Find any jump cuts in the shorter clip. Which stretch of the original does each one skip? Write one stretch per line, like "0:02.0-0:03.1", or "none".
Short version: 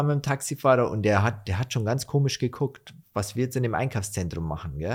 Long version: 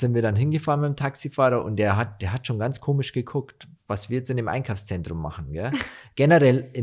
none